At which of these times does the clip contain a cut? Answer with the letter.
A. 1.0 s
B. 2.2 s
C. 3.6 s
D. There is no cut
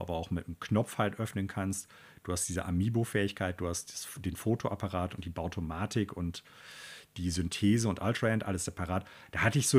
D